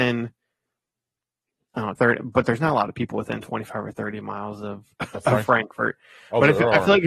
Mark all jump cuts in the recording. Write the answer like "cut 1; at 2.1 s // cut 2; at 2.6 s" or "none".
cut 1; at 1.9 s